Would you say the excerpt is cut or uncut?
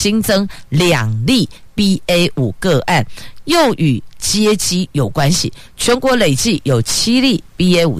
uncut